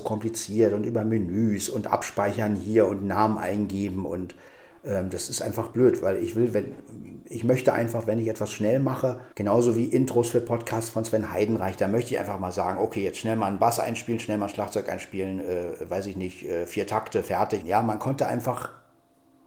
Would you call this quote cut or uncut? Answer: cut